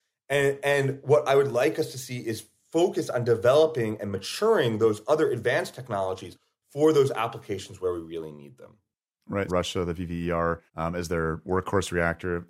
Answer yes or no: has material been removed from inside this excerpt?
yes